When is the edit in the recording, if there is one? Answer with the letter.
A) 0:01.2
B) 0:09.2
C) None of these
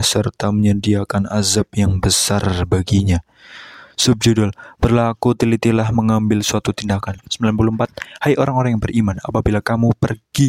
C